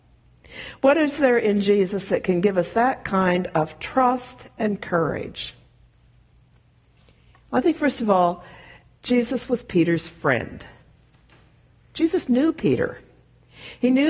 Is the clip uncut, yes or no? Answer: yes